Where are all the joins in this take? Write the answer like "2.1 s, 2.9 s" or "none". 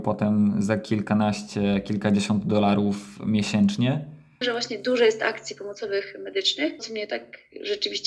4.4 s, 6.8 s